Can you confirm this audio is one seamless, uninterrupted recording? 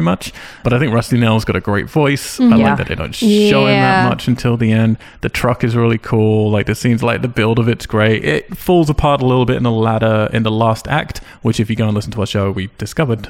yes; 0 cuts

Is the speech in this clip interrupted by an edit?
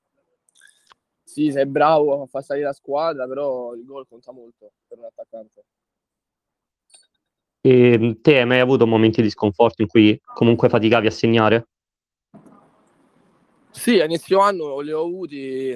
no; 0 cuts

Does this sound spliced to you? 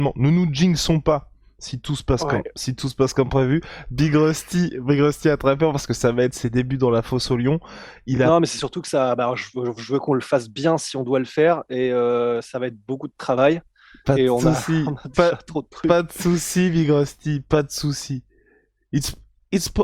no; 0 cuts

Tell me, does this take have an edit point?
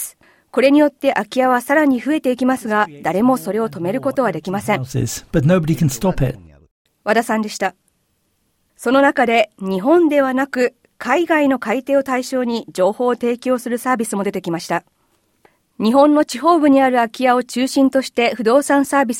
yes; 1 cut; at 8.7 s

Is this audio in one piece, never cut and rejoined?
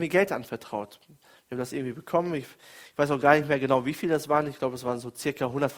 yes; 0 cuts

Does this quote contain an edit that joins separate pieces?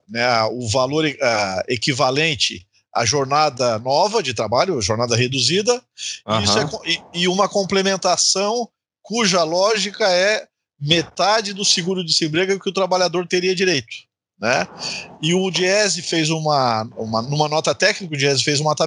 no; 0 cuts

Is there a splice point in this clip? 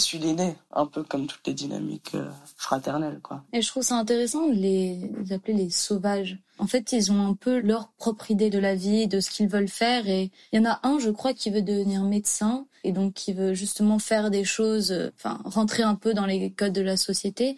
no; 0 cuts

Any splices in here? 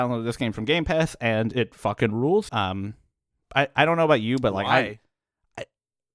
yes; 1 cut; at 2.5 s

